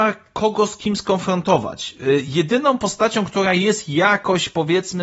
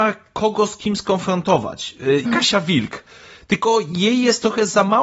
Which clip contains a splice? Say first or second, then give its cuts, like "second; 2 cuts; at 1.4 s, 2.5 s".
second; 1 cut; at 2.2 s